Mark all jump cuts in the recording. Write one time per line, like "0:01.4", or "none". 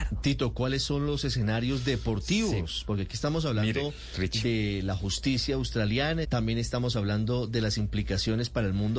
0:06.2